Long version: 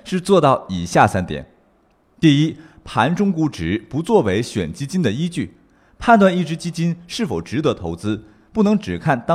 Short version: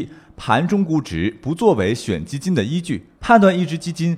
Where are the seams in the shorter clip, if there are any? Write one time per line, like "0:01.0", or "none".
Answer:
0:03.1